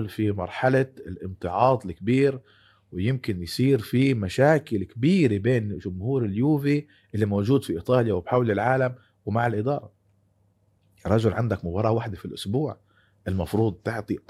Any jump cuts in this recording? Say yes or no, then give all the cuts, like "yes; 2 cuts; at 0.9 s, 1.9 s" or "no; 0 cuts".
no; 0 cuts